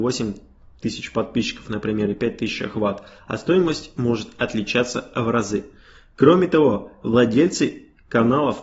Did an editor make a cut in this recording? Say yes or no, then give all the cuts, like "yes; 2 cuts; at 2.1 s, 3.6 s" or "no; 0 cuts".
no; 0 cuts